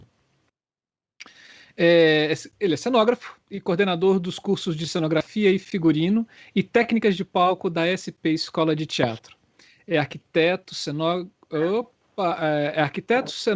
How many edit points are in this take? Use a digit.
0